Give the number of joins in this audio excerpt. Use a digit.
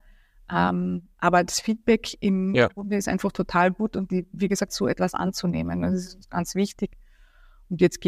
1